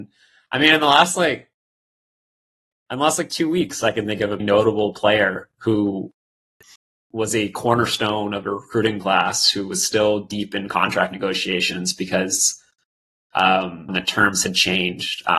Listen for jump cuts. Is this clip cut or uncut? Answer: cut